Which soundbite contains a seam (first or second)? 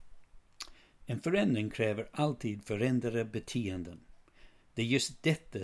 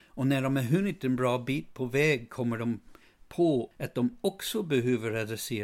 second